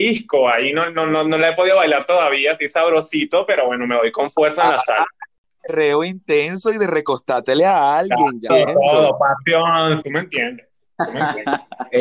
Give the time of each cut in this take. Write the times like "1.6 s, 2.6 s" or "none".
8.5 s, 10.0 s